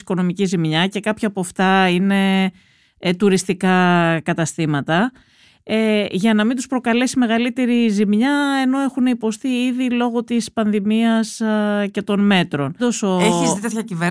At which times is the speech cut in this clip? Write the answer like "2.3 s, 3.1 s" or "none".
12.8 s